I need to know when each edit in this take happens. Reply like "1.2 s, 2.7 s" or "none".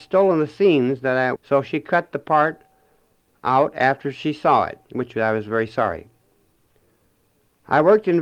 1.4 s, 4.8 s